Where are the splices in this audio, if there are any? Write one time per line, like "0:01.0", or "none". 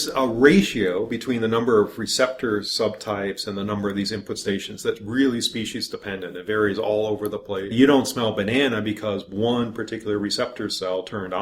0:07.7

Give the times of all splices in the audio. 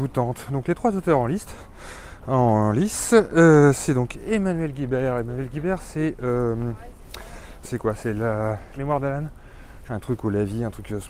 0:07.6
0:08.8
0:09.9

